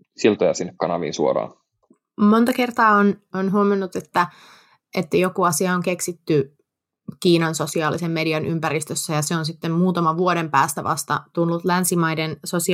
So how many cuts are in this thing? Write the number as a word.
zero